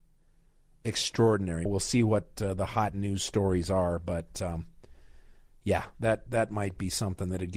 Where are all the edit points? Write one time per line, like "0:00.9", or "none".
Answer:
0:01.7

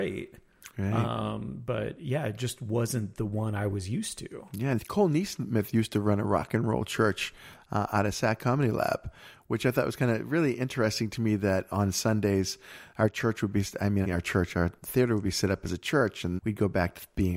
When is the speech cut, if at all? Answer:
0:14.0
0:16.4

